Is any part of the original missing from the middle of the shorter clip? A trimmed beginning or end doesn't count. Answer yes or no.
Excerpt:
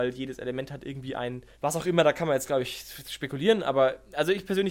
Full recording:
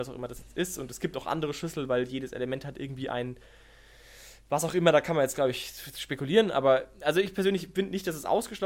yes